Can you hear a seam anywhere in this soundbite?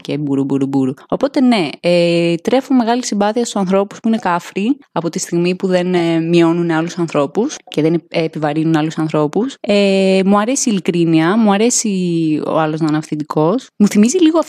no; 0 cuts

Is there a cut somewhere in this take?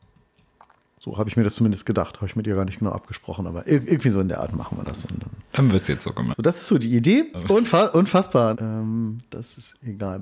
yes; 3 cuts; at 6.3 s, 7.3 s, 8.5 s

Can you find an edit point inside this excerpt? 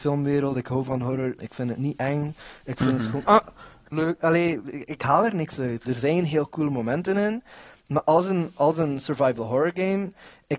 yes; 3 cuts; at 1.4 s, 3.9 s, 5.8 s

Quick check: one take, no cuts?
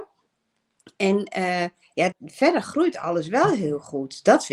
no; 1 cut; at 2.1 s

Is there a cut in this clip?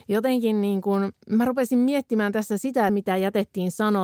yes; 2 cuts; at 1.2 s, 2.9 s

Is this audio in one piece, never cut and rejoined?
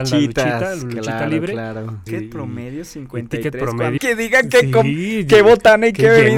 no; 2 cuts; at 2.1 s, 4.0 s

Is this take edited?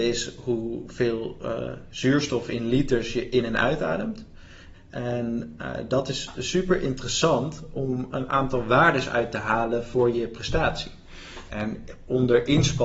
yes; 2 cuts; at 4.7 s, 11.5 s

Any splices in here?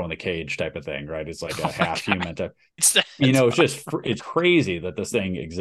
yes; 2 cuts; at 2.8 s, 4.2 s

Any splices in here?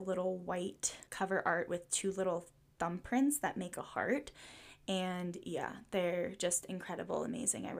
yes; 1 cut; at 1.1 s

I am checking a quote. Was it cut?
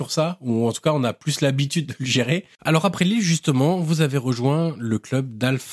yes; 1 cut; at 2.5 s

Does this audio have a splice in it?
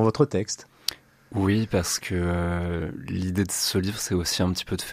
no; 0 cuts

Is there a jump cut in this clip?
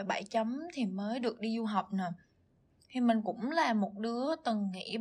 no; 0 cuts

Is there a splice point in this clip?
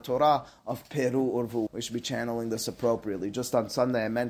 yes; 1 cut; at 1.7 s

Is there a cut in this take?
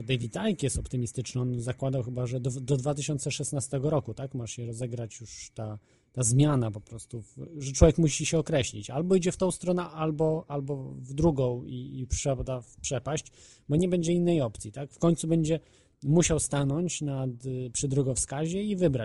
no; 0 cuts

